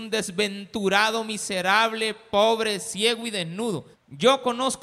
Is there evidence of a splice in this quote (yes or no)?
yes